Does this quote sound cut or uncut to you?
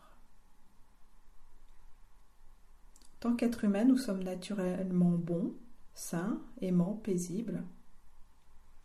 uncut